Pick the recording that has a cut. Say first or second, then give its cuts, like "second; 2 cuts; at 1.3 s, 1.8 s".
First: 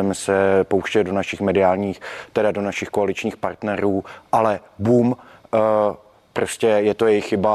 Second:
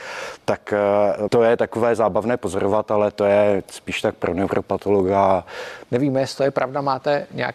second; 2 cuts; at 1.3 s, 5.8 s